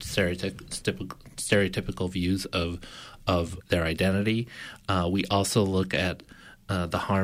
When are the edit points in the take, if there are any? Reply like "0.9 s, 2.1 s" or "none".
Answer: 3.6 s